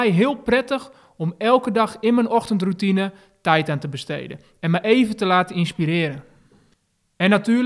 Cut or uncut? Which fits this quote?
uncut